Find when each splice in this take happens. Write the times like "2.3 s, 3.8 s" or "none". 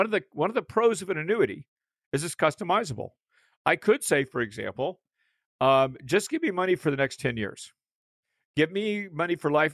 none